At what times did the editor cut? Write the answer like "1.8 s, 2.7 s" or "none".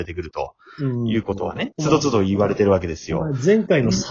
1.7 s